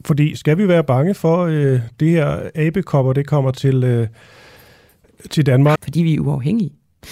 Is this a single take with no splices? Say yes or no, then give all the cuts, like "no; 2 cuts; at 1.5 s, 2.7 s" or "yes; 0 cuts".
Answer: no; 1 cut; at 5.8 s